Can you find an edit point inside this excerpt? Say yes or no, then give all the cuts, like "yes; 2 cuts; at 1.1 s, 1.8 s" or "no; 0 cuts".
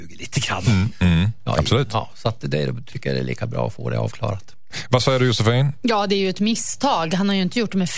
yes; 1 cut; at 0.9 s